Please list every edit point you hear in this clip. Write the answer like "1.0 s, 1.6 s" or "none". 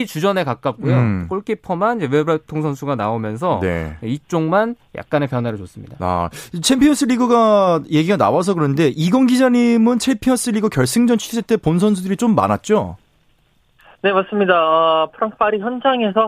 none